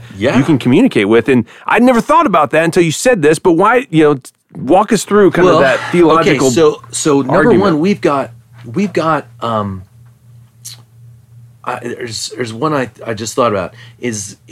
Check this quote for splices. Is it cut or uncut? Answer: uncut